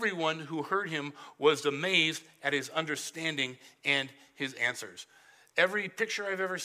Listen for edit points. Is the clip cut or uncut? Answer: uncut